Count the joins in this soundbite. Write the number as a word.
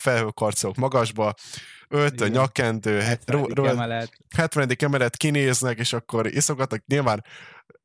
zero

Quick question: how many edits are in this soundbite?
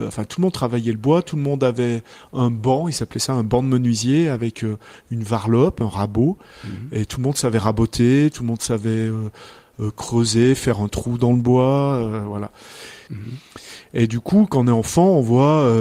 one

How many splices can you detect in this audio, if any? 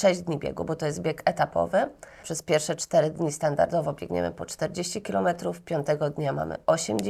one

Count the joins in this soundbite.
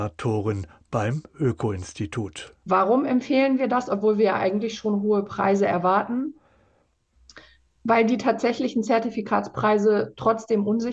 zero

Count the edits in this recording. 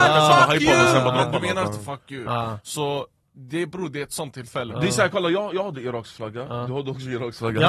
one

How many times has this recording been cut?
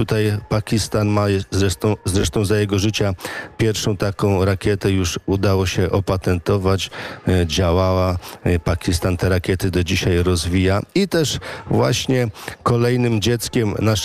zero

